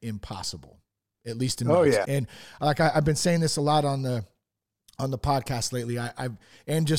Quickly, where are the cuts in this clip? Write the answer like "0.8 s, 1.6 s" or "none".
2.0 s